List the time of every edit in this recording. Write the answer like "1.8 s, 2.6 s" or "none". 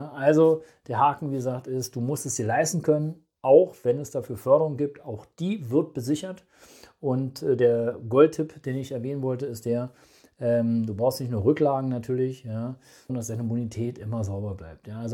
13.1 s